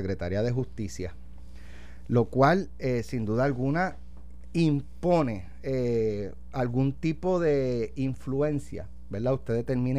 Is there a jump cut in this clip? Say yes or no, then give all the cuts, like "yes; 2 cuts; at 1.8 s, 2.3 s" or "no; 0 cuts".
no; 0 cuts